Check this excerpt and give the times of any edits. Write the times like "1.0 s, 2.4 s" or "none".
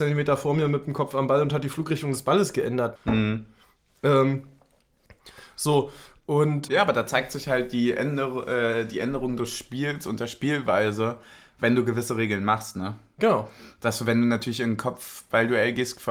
3.0 s, 6.7 s